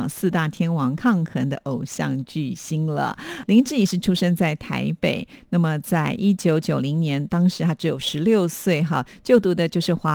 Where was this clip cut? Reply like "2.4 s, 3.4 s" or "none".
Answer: 3.4 s

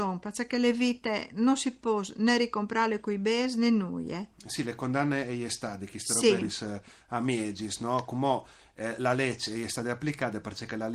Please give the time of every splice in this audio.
6.4 s

